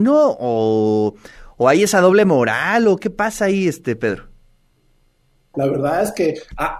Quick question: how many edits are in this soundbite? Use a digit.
1